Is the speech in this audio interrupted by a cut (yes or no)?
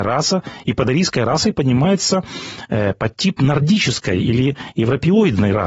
no